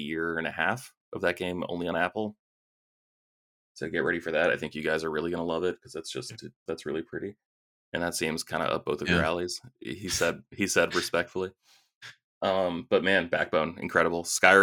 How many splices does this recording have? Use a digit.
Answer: 1